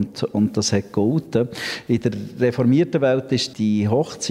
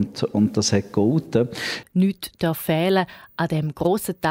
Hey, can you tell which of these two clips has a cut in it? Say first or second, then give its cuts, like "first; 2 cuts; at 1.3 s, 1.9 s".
second; 1 cut; at 1.8 s